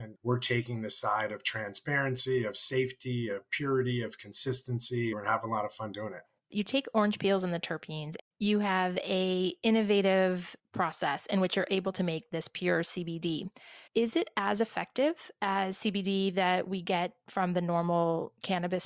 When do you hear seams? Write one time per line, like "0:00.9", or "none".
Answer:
0:05.1
0:13.9